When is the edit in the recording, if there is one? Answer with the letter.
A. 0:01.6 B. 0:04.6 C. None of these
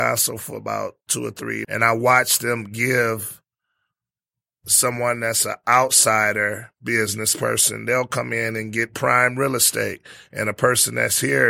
A